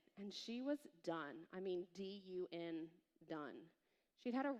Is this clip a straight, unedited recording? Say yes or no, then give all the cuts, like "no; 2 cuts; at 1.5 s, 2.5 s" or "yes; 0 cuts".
yes; 0 cuts